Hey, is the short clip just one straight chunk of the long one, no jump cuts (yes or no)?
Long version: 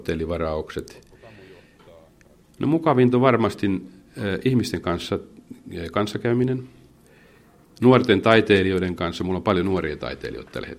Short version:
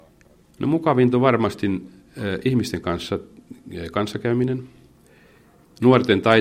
yes